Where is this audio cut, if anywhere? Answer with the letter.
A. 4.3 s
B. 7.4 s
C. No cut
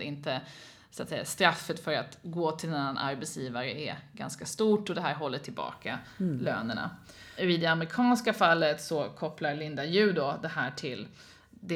B